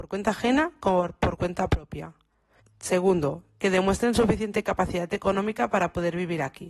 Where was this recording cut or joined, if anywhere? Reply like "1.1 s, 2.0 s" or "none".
2.6 s